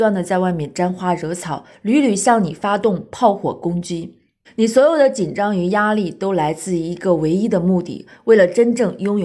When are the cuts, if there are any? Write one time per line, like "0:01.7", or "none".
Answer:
0:04.4